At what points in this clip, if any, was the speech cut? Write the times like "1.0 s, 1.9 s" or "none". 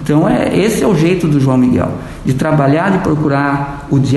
none